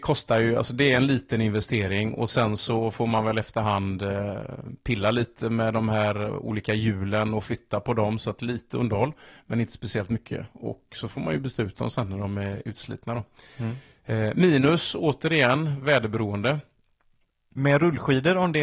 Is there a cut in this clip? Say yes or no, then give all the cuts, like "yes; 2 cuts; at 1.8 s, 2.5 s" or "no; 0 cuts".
no; 0 cuts